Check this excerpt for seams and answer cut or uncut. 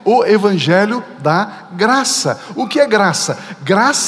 uncut